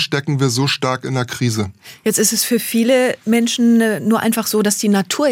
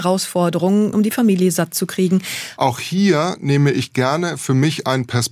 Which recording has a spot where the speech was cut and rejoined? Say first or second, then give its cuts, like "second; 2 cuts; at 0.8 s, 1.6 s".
second; 2 cuts; at 0.9 s, 2.6 s